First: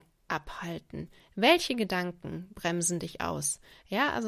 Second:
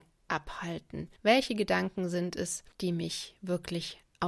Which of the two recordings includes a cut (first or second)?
second